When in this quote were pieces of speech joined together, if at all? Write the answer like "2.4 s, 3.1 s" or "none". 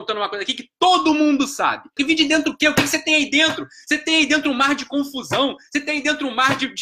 2.0 s